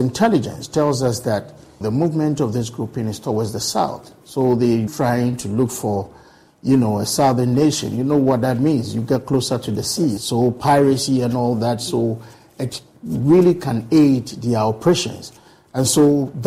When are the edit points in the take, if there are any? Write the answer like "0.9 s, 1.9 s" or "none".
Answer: 1.8 s, 4.9 s, 10.2 s

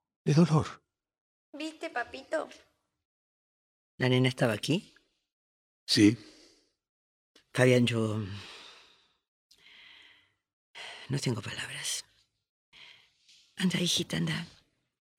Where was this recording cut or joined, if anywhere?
7.4 s

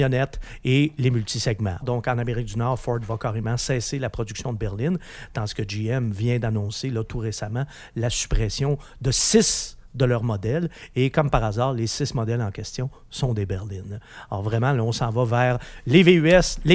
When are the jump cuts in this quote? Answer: 1.8 s

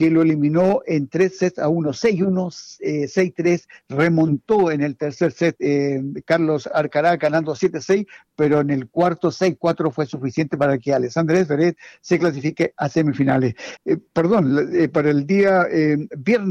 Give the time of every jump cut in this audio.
13.8 s

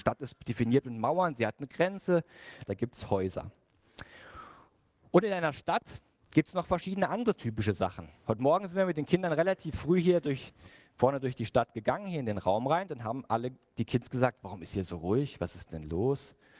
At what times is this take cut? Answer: 2.6 s

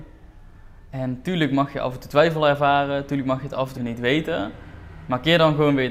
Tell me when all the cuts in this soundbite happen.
3.8 s

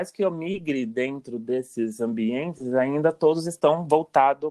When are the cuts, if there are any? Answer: none

